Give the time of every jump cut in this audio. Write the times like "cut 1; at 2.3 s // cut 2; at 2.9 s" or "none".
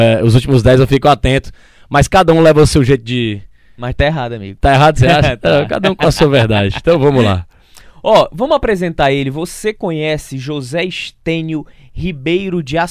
none